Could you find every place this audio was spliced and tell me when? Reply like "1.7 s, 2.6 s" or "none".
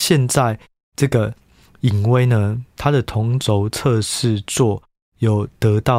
none